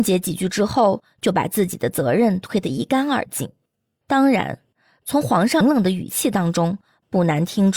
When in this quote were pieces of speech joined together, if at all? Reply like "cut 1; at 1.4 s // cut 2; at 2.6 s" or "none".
cut 1; at 4.0 s // cut 2; at 5.6 s